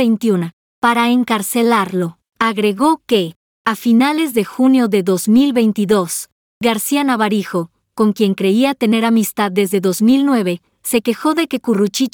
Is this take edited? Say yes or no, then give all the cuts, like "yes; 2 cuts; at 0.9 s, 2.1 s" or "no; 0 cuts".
yes; 1 cut; at 2.3 s